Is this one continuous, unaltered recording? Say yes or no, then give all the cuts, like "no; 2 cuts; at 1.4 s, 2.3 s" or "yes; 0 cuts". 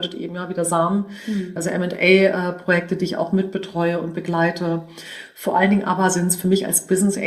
no; 1 cut; at 1.6 s